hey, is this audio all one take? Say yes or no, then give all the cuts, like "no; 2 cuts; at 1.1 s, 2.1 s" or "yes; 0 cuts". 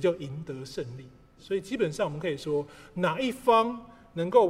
no; 1 cut; at 1.4 s